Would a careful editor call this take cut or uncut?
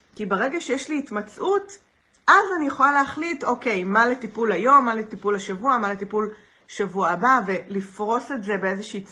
uncut